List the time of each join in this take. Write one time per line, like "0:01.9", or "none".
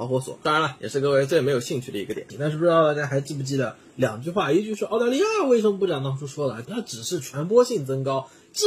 0:02.3
0:06.6